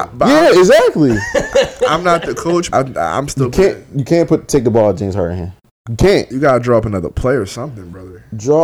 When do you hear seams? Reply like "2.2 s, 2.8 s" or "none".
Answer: 2.7 s